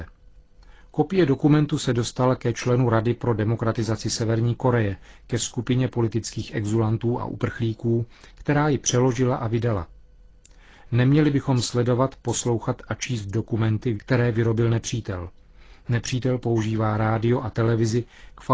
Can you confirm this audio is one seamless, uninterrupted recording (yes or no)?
no